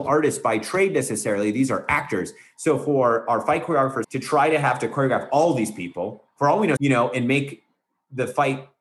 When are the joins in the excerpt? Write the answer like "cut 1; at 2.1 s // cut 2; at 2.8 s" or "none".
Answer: cut 1; at 4.0 s // cut 2; at 6.8 s